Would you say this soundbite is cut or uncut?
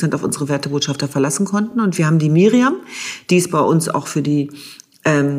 uncut